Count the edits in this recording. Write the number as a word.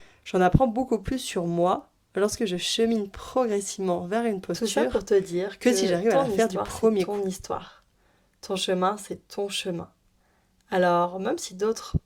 zero